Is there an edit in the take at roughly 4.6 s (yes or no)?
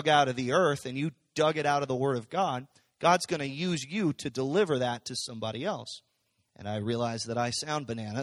no